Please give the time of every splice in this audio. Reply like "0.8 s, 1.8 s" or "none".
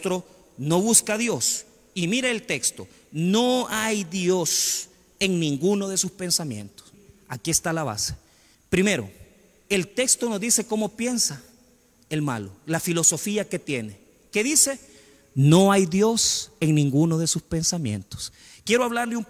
none